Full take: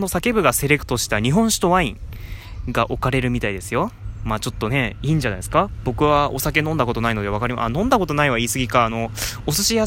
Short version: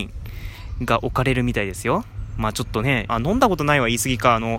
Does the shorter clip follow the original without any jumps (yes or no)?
no